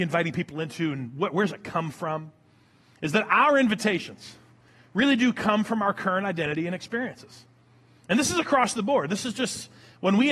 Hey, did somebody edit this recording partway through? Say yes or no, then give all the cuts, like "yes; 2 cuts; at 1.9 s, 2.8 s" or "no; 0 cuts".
no; 0 cuts